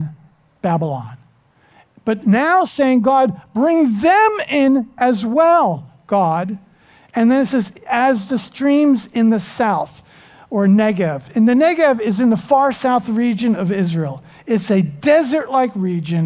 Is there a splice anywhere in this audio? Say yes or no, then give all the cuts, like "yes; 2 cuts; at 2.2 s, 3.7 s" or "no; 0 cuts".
no; 0 cuts